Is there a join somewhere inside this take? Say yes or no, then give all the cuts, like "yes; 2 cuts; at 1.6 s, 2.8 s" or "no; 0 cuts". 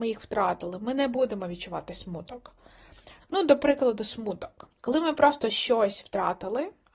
yes; 2 cuts; at 3.2 s, 4.8 s